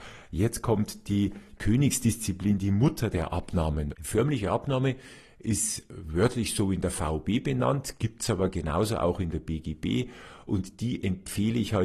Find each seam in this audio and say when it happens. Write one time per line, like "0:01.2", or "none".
0:03.9